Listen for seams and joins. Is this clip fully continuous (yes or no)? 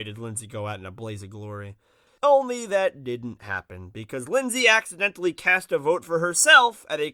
no